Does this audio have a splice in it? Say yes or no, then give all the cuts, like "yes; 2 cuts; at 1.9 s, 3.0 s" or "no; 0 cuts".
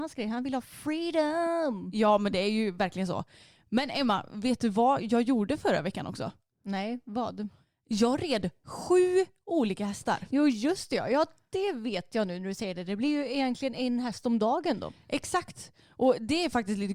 no; 0 cuts